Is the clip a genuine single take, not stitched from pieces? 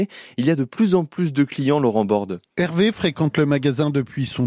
no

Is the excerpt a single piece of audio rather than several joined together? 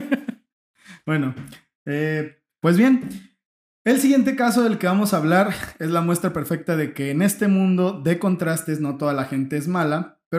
yes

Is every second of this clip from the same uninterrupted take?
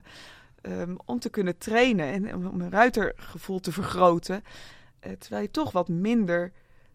yes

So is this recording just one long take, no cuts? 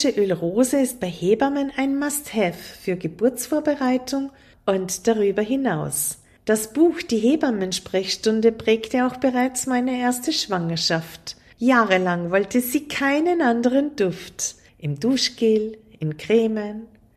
no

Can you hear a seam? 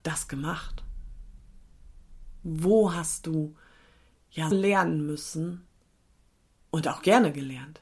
yes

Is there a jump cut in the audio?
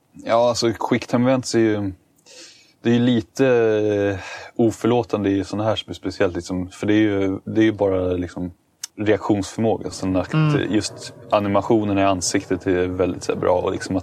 yes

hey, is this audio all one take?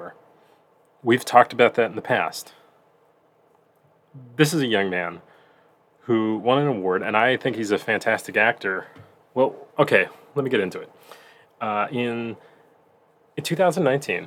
yes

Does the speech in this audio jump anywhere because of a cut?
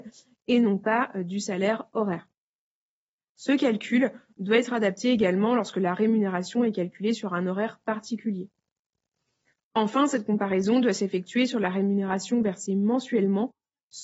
no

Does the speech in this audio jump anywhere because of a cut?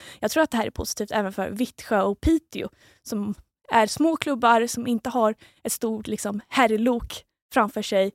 no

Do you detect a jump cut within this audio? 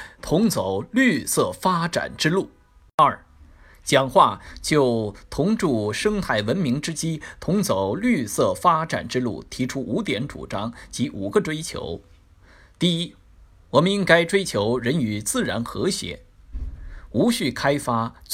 no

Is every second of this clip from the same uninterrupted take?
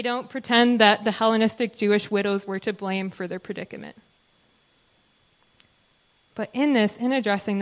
yes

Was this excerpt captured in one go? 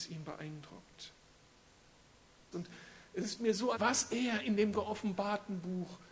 no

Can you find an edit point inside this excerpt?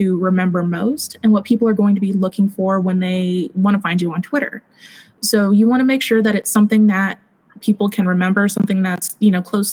no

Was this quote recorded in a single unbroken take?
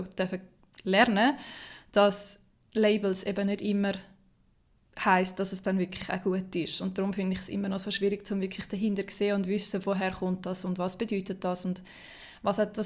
yes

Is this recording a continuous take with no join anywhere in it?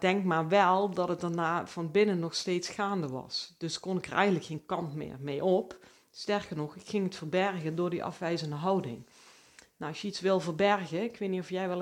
yes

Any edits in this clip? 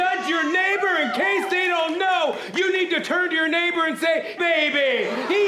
yes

